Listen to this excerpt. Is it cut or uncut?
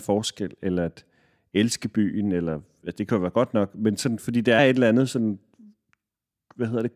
cut